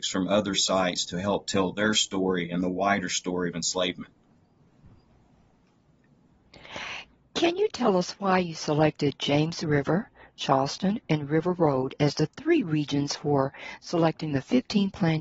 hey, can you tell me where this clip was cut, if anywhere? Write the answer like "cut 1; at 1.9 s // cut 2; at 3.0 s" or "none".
none